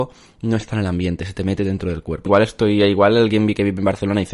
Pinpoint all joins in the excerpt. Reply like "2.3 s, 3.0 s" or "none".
2.3 s